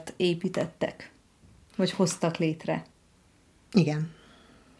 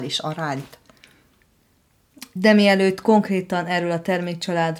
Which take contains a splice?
second; 1 cut; at 2.4 s

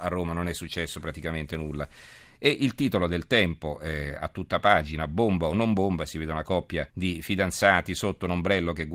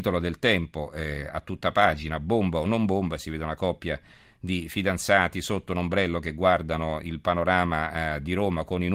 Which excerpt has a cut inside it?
first; 1 cut; at 6.9 s

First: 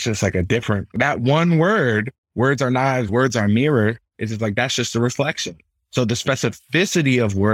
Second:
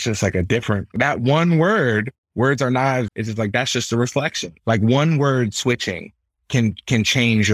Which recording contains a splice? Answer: second; 2 cuts; at 3.1 s, 4.6 s

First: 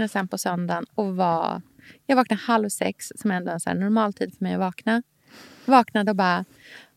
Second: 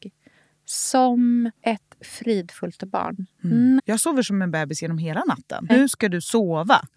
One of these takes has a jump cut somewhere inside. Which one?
second; 3 cuts; at 1.6 s, 3.8 s, 5.7 s

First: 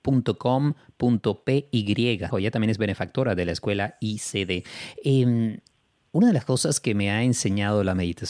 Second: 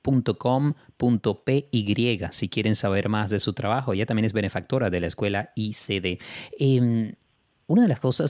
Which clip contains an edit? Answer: first; 1 cut; at 2.3 s

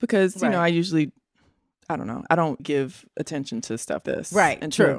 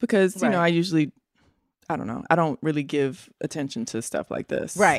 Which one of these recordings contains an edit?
first; 2 cuts; at 2.6 s, 4.0 s

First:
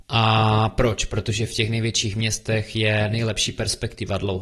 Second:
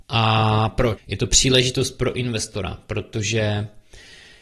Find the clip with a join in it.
second; 1 cut; at 1.0 s

